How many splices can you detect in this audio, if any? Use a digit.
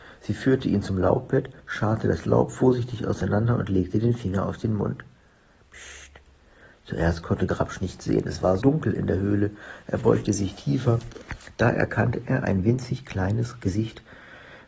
1